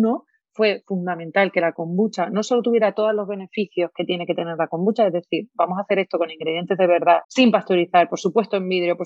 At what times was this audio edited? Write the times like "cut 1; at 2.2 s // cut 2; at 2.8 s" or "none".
cut 1; at 7.2 s